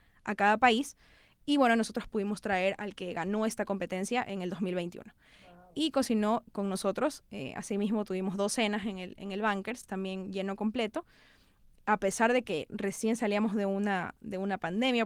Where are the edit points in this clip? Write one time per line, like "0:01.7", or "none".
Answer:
none

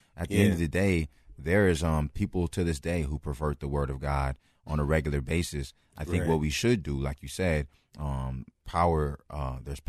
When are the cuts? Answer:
none

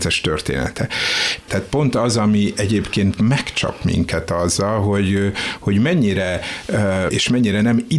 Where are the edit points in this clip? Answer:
0:01.5
0:07.1

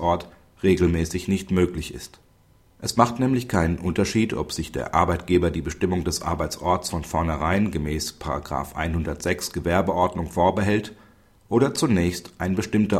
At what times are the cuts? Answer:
none

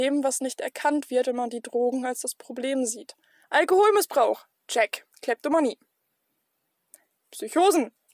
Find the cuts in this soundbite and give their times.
0:03.4
0:05.1

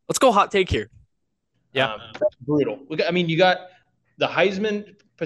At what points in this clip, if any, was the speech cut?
0:01.5

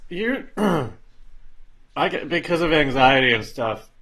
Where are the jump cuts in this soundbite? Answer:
0:01.9

